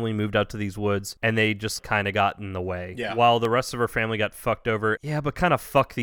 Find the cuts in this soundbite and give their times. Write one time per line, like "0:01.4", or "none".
0:05.0